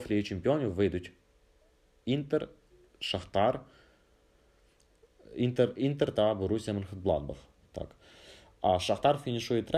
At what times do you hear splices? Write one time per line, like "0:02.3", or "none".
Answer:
none